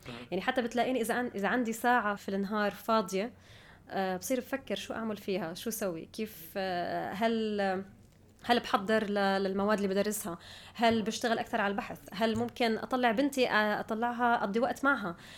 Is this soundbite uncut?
no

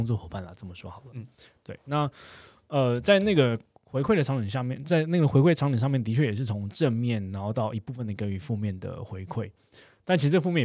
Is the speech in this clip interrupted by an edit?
no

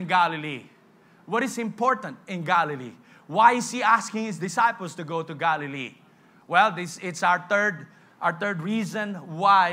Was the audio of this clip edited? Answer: no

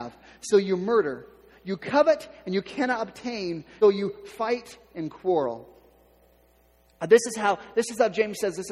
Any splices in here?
yes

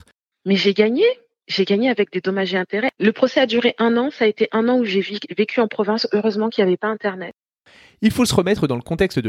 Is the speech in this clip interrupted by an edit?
no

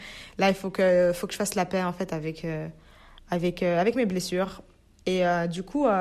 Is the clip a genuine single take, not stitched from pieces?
yes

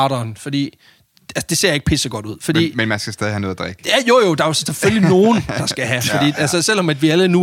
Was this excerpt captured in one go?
yes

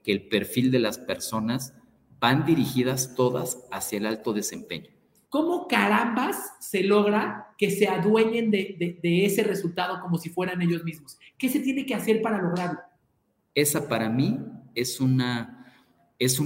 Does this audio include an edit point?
yes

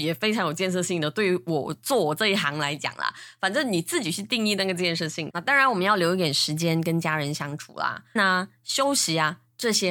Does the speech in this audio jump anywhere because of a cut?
yes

